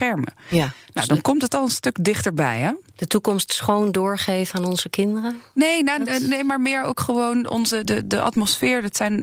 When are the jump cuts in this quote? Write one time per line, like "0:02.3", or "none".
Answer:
0:07.9